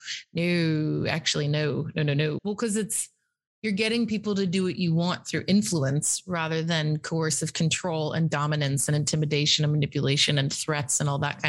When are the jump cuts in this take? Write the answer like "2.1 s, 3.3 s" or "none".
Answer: 2.4 s